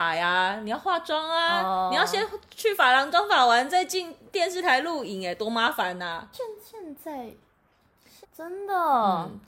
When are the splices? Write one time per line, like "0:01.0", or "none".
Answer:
0:06.3
0:08.2